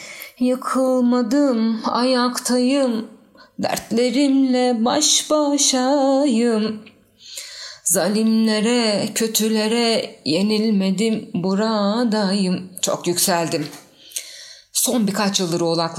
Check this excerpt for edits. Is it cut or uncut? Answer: uncut